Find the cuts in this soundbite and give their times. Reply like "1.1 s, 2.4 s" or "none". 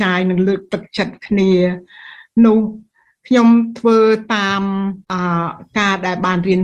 5.0 s